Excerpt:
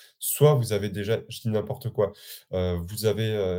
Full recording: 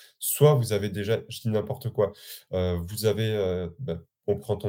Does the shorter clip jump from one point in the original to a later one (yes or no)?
no